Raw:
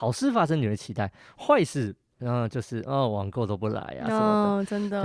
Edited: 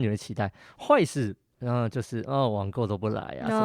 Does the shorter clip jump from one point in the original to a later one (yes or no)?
no